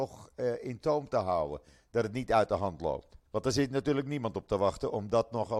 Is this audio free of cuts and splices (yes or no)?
no